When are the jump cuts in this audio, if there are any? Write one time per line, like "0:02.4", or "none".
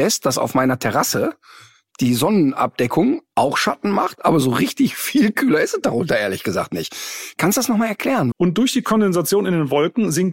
0:08.3